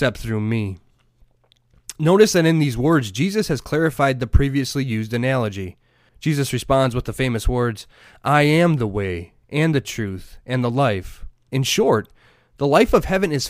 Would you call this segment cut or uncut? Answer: cut